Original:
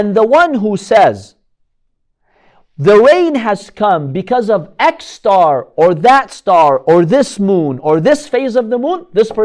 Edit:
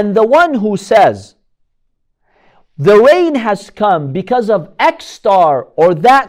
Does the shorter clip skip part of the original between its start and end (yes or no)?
no